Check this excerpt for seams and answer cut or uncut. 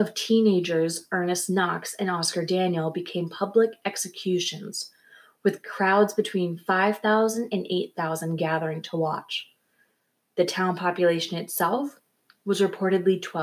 uncut